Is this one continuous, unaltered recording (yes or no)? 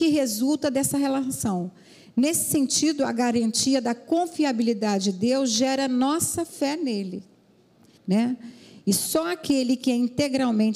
no